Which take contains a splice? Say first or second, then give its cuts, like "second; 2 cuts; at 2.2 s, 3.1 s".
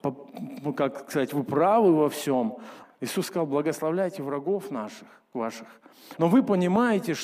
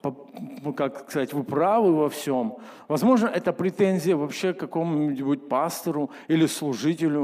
first; 2 cuts; at 2.8 s, 6.2 s